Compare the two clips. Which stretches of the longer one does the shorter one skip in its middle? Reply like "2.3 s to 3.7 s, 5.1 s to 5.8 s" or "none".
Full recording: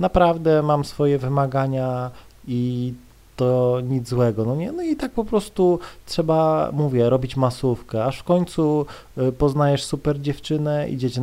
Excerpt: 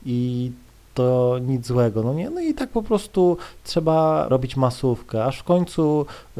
6.7 s to 7.1 s